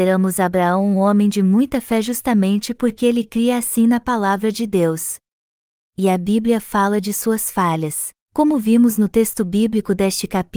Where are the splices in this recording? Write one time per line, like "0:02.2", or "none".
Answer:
0:05.8
0:08.2

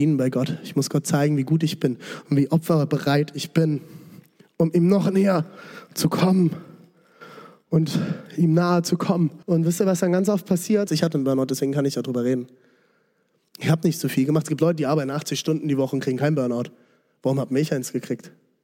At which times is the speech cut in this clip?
0:09.4
0:10.9

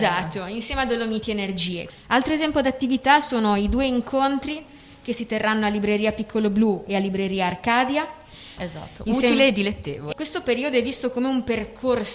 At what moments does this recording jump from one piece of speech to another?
0:01.9
0:08.6
0:10.1

